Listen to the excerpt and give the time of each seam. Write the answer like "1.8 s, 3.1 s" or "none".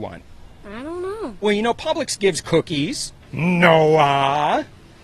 1.4 s, 3.3 s